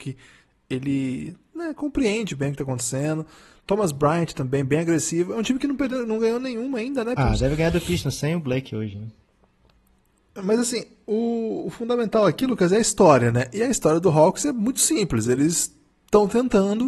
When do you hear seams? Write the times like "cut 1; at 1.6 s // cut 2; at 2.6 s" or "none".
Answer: cut 1; at 7.2 s